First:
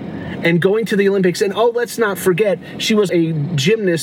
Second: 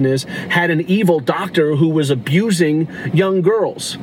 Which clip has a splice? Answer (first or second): first